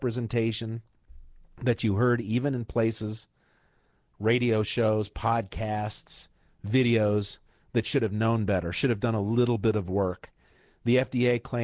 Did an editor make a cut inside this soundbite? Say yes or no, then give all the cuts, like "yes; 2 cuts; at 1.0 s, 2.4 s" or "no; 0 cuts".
no; 0 cuts